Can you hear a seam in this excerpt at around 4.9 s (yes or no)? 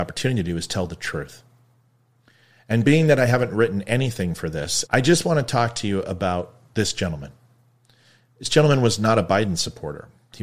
yes